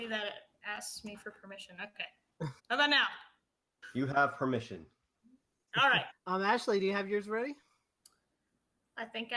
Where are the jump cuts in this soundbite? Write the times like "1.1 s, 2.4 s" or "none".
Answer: 2.6 s, 6.1 s